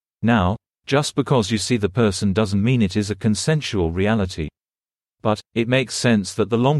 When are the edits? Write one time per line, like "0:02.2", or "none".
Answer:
none